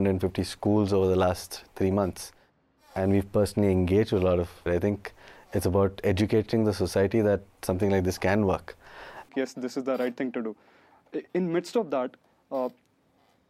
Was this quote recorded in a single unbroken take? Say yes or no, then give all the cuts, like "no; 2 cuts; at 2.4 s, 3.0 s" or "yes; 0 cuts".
no; 2 cuts; at 4.7 s, 9.3 s